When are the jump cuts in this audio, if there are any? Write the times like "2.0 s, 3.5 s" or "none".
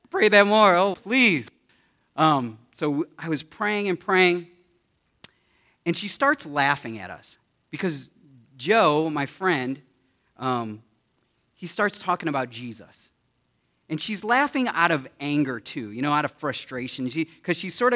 0.9 s